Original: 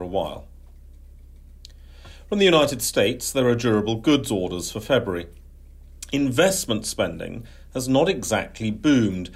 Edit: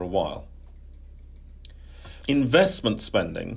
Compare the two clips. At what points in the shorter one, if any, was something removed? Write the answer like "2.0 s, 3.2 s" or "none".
2.2 s